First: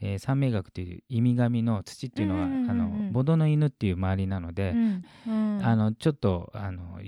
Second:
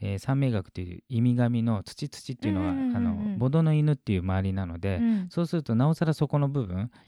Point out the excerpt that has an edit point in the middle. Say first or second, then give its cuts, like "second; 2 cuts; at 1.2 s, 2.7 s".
first; 2 cuts; at 1.8 s, 5.0 s